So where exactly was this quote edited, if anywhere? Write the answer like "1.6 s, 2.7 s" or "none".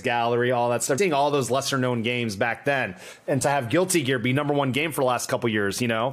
1.0 s